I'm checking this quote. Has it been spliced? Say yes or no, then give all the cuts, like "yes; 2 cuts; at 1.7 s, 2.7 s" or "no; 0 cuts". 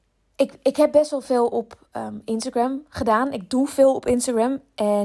no; 0 cuts